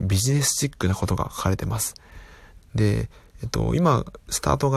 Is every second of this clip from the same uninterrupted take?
no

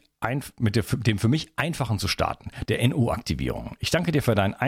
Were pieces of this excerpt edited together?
yes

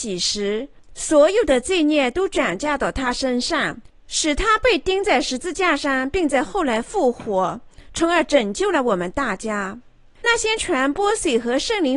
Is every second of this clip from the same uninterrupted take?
no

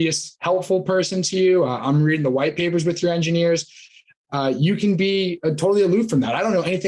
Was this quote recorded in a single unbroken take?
yes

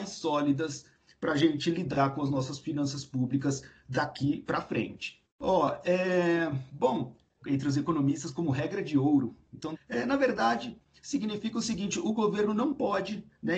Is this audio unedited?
no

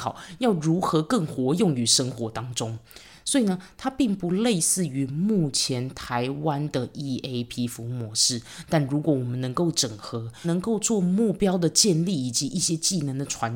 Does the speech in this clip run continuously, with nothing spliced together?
no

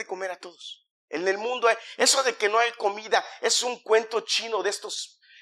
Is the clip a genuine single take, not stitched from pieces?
yes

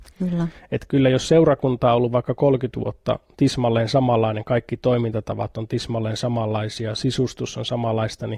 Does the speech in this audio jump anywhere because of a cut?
no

